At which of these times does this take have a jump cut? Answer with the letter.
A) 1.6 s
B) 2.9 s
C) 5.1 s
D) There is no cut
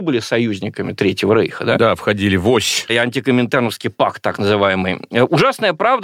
B